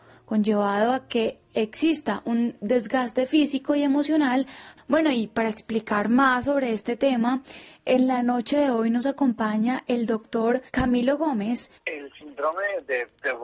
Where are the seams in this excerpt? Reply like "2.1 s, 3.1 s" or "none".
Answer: 10.7 s, 11.7 s

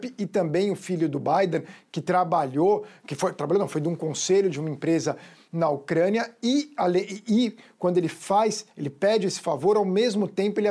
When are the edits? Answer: none

